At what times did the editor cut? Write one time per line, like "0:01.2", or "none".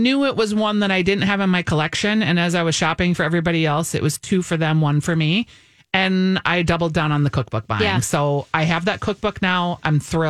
none